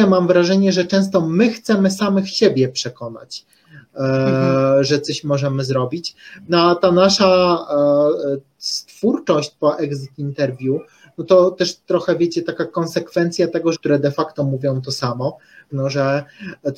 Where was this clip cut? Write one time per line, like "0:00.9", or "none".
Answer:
0:13.7
0:15.7